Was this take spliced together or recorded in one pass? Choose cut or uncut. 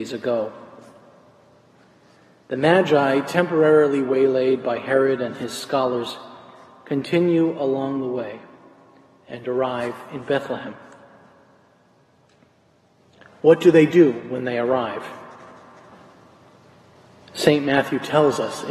uncut